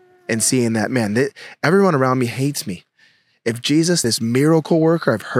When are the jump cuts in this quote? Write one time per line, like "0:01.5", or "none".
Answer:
0:04.0